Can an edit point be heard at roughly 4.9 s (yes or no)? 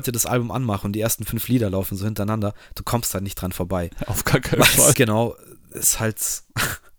yes